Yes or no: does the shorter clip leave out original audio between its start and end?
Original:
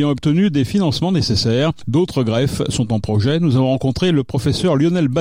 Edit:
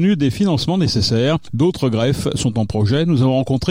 no